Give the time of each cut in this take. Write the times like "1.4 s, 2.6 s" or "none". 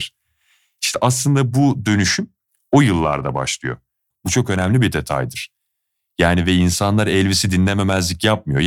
4.1 s